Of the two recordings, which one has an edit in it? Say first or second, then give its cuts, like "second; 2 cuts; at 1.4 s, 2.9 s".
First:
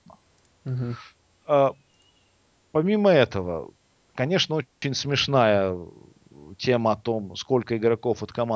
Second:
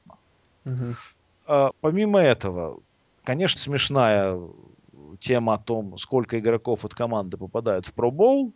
second; 2 cuts; at 1.7 s, 3.6 s